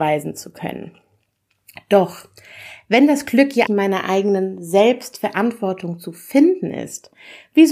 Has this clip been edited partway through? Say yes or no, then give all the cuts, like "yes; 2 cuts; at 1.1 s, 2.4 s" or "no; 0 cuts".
yes; 1 cut; at 3.7 s